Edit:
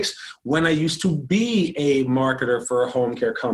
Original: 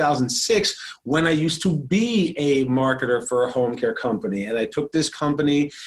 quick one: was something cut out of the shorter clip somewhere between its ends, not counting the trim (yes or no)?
no